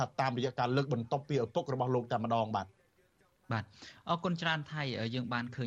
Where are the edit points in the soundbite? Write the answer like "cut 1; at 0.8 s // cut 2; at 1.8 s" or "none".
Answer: none